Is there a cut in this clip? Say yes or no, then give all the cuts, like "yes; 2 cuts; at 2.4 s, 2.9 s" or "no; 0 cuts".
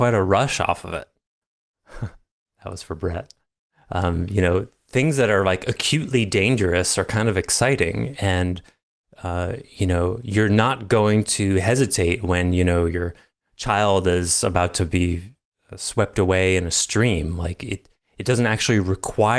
yes; 1 cut; at 1.4 s